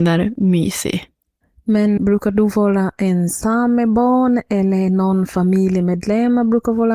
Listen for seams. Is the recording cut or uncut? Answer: cut